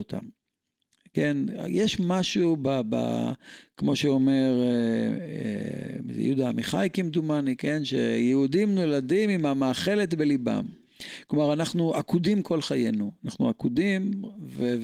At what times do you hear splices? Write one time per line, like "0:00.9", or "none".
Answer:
none

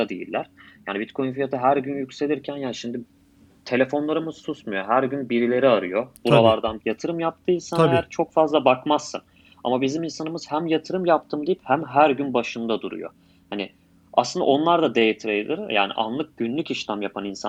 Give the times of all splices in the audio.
0:06.8

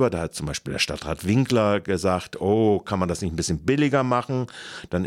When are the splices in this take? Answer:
none

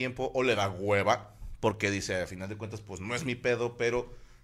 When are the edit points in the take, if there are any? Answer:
none

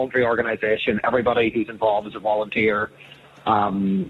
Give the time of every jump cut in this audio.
none

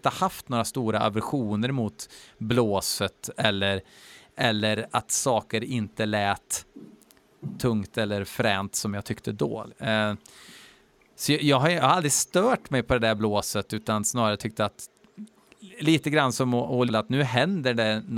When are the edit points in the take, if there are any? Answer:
0:09.7
0:16.9

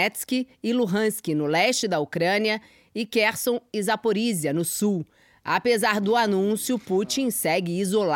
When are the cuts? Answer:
none

